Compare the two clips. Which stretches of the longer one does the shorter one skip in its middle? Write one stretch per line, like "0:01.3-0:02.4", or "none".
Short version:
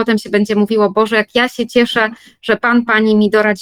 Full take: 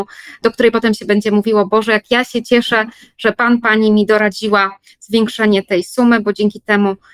none